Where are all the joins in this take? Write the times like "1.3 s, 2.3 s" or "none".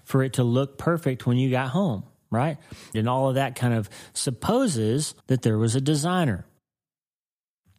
2.9 s, 5.2 s